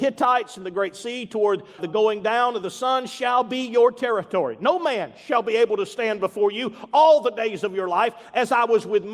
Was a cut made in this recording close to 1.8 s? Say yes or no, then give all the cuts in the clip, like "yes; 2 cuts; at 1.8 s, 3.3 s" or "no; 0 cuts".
yes; 1 cut; at 1.8 s